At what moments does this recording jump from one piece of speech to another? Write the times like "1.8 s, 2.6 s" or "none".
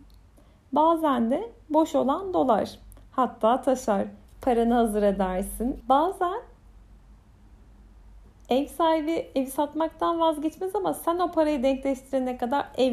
4.2 s, 5.8 s